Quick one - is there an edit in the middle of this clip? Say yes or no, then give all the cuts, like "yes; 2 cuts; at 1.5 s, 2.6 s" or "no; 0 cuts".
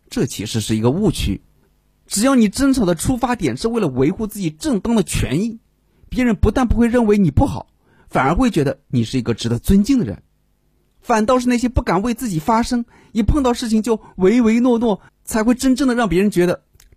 yes; 1 cut; at 15.1 s